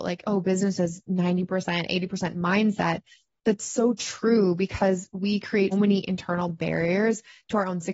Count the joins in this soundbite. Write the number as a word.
one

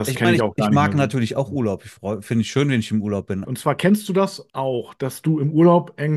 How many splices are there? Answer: two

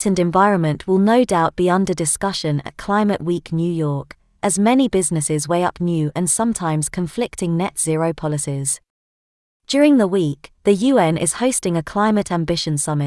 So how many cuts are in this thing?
zero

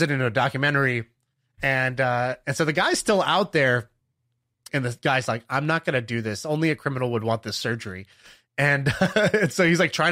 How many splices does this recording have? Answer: one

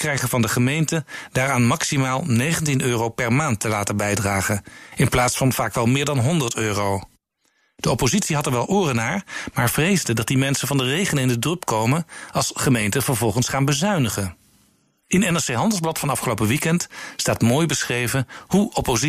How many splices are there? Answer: zero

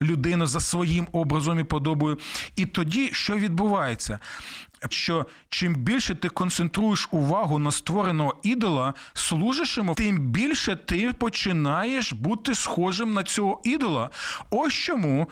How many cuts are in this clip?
two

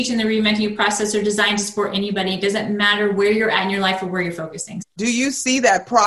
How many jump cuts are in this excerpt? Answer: one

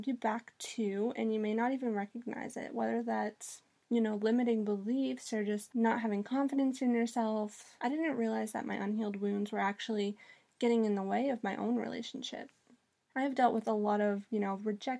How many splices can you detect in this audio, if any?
one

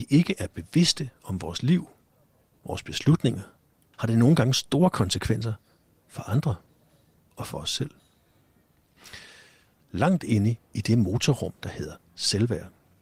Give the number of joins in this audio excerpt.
two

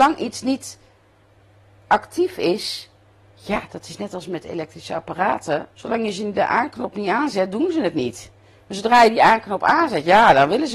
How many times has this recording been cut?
one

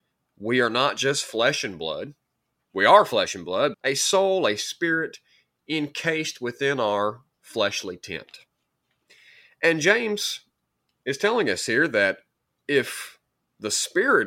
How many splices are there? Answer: one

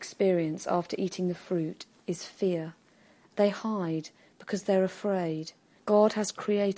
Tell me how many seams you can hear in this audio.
one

